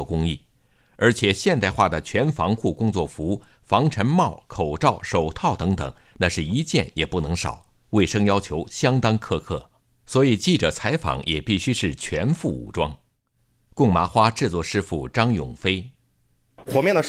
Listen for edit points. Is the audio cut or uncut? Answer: uncut